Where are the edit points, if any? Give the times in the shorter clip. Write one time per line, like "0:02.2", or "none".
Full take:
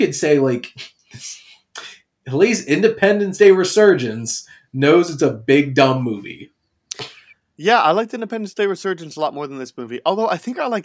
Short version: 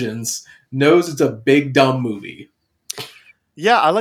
none